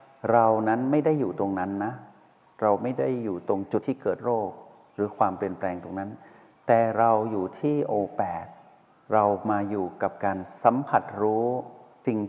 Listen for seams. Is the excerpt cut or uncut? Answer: uncut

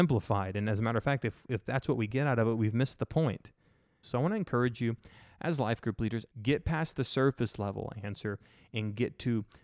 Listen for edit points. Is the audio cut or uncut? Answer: cut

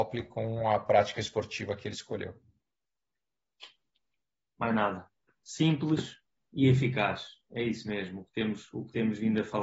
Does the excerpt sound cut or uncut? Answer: uncut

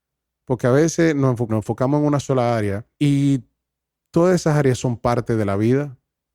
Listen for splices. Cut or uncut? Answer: cut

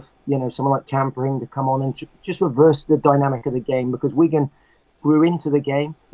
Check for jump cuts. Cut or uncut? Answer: uncut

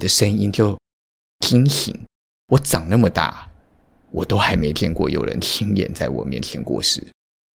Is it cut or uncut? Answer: cut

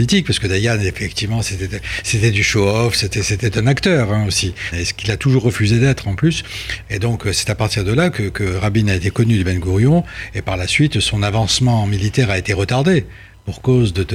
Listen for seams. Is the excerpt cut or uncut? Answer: cut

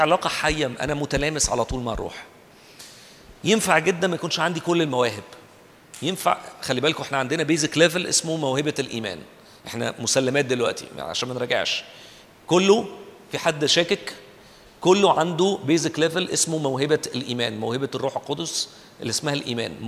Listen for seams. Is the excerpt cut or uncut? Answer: uncut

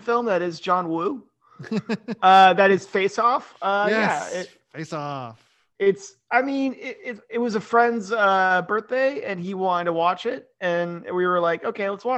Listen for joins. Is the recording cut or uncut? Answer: uncut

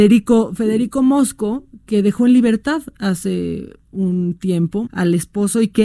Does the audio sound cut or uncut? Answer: cut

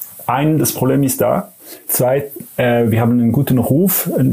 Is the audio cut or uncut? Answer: cut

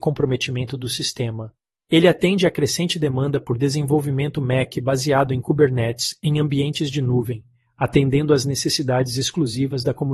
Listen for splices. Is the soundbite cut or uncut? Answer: cut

